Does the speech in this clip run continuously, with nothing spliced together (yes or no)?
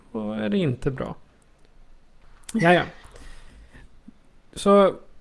yes